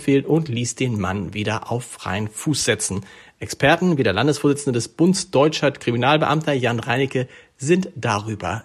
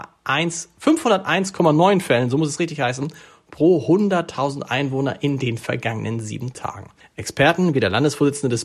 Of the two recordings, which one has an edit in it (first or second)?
second